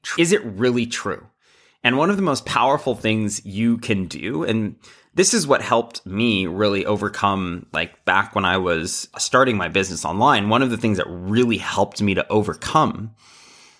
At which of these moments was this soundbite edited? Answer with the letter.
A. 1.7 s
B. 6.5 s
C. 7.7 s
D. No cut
D